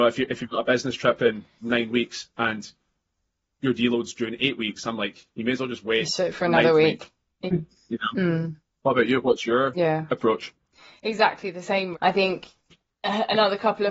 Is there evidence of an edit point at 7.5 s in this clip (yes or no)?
yes